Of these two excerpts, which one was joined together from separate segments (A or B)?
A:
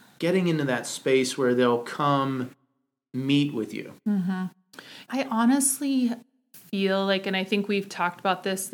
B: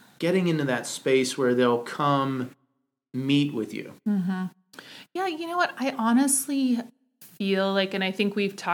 A